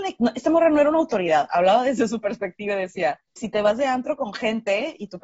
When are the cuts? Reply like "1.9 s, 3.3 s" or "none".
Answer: 3.4 s

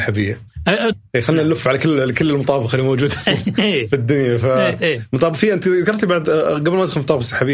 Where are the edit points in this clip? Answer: 0.9 s

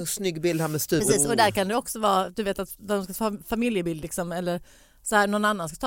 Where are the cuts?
none

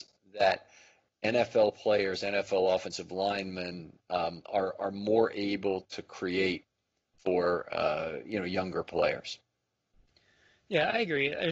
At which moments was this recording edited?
none

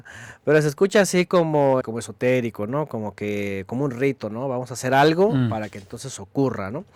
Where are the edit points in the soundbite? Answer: 1.8 s

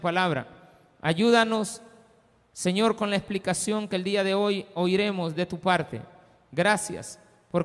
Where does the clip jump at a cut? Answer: none

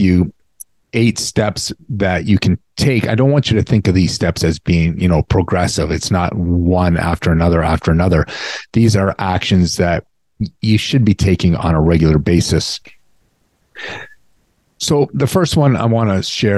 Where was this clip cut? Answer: none

